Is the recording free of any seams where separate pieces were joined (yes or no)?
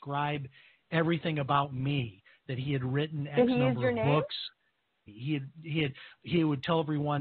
no